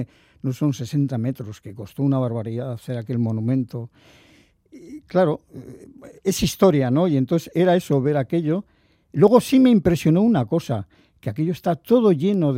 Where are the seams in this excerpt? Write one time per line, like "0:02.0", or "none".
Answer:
none